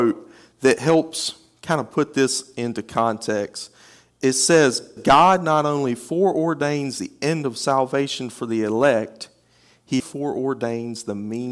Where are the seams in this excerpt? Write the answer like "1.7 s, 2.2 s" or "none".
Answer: 5.0 s, 10.0 s